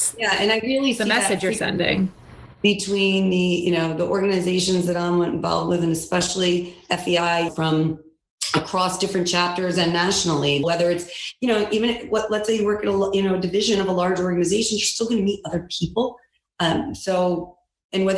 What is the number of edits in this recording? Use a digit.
2